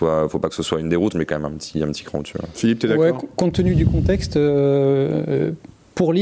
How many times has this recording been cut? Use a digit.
1